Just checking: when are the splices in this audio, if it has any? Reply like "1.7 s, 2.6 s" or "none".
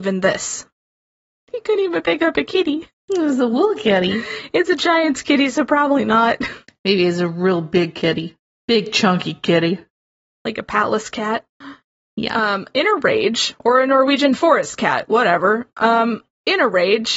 6.7 s

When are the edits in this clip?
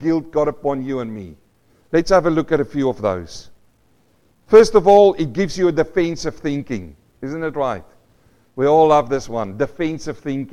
none

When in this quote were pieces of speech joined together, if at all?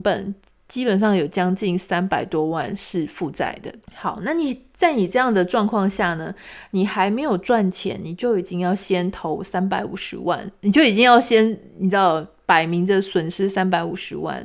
3.9 s

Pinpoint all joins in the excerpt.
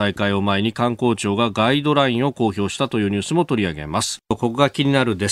4.2 s

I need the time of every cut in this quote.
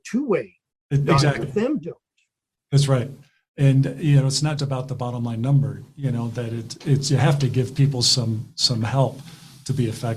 1.4 s, 4.6 s

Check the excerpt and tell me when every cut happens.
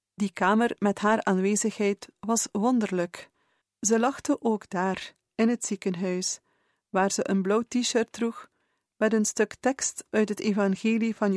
3.6 s

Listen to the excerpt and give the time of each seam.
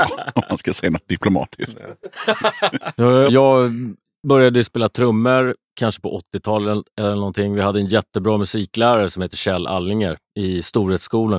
3.3 s

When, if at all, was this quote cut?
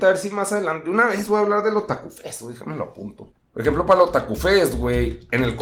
none

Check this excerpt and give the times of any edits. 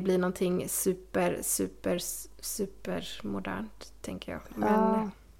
none

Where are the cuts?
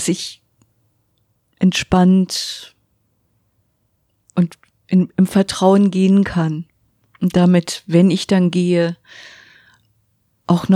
none

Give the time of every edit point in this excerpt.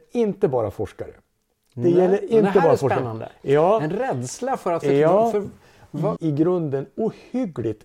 6.2 s

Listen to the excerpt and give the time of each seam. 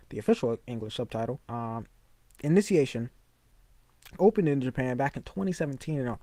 1.4 s, 4.2 s

